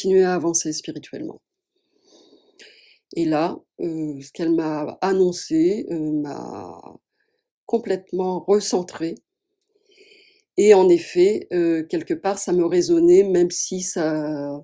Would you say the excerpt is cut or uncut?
uncut